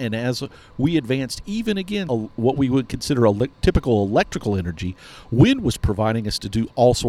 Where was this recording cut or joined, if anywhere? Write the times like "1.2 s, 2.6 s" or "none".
2.1 s, 3.5 s